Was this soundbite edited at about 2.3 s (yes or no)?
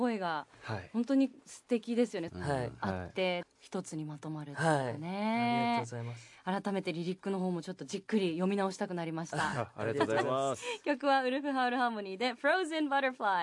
yes